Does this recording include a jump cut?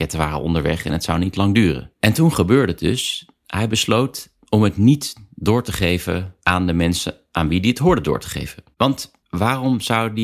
yes; 1 cut; at 9.2 s

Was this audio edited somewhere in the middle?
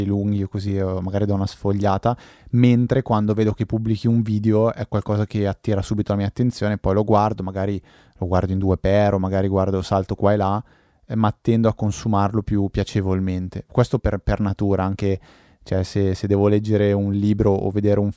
yes; 1 cut; at 14.0 s

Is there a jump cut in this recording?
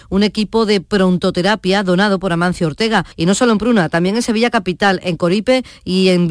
yes; 1 cut; at 3.1 s

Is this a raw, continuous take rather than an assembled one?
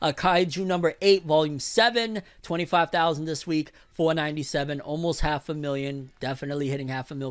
yes; 0 cuts

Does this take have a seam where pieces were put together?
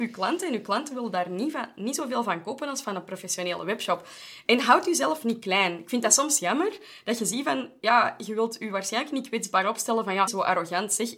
yes; 1 cut; at 10.3 s

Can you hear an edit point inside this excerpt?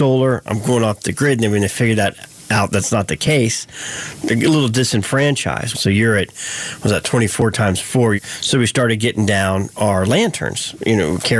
yes; 2 cuts; at 5.7 s, 8.1 s

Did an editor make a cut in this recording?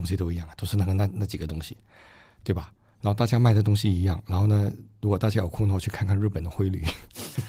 no; 0 cuts

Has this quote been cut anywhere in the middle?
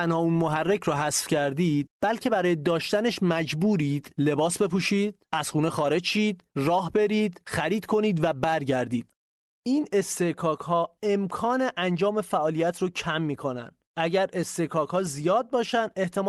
yes; 1 cut; at 13.8 s

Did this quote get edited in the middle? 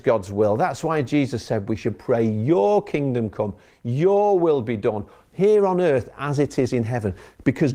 no; 0 cuts

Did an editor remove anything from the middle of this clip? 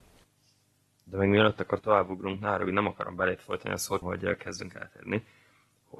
yes; 2 cuts; at 1.8 s, 4.0 s

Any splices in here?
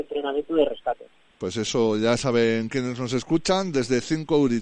yes; 1 cut; at 1.3 s

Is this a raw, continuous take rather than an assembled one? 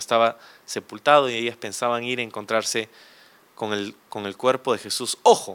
yes; 0 cuts

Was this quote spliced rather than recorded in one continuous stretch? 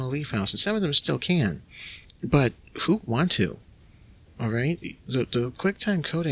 no; 0 cuts

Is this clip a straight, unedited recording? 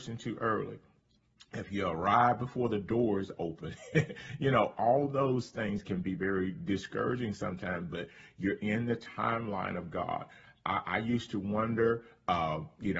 yes; 0 cuts

